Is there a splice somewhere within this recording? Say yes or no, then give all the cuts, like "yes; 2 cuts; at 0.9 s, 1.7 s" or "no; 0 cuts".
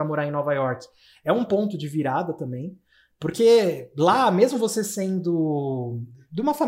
no; 0 cuts